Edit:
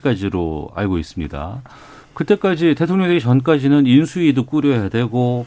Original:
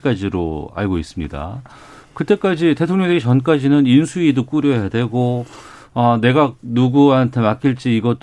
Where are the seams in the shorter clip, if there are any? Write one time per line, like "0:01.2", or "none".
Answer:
none